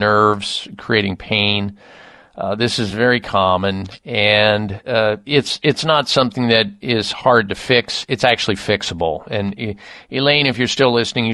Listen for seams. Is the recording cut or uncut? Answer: uncut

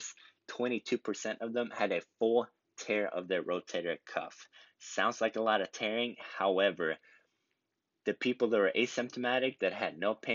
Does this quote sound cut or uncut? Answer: uncut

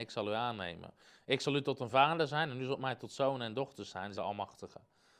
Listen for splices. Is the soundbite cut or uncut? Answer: cut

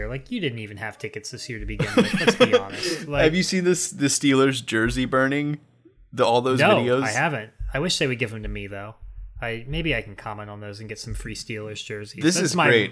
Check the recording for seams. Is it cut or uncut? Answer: uncut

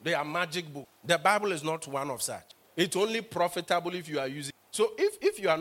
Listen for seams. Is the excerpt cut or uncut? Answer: uncut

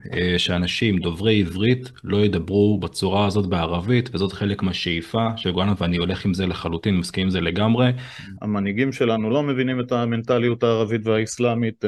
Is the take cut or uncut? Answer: cut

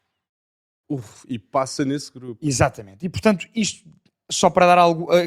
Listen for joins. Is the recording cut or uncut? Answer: uncut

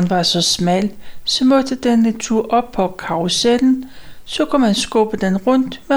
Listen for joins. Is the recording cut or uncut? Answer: cut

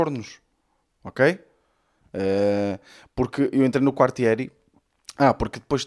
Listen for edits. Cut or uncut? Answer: uncut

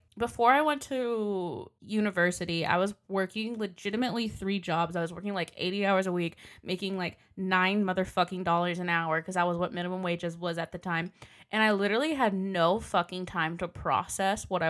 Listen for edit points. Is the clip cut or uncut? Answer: uncut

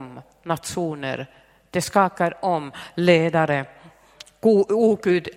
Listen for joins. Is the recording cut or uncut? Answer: uncut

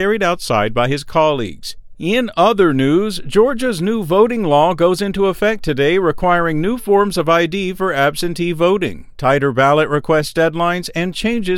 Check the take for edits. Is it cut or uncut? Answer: cut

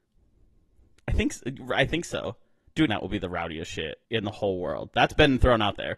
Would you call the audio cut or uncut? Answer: cut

